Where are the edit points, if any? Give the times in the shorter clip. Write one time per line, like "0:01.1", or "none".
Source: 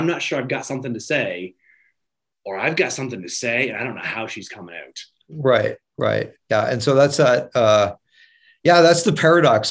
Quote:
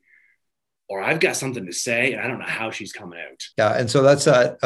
0:03.5